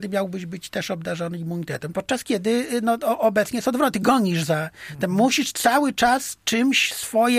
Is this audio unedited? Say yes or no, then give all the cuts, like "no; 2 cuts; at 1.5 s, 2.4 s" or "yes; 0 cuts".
no; 1 cut; at 1.9 s